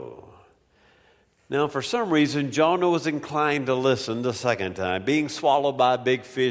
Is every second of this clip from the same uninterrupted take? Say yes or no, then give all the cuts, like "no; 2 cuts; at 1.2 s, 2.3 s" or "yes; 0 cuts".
yes; 0 cuts